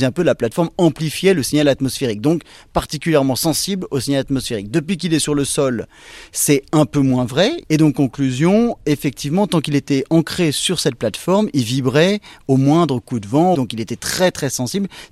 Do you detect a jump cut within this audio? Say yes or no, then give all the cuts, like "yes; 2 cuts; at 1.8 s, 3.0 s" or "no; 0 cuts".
yes; 2 cuts; at 7.6 s, 13.5 s